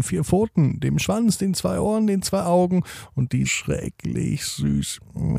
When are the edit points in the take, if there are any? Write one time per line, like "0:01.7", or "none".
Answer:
0:03.4